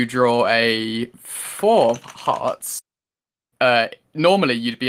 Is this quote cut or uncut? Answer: uncut